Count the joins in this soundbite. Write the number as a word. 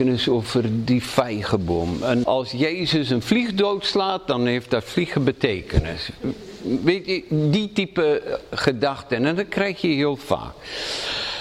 one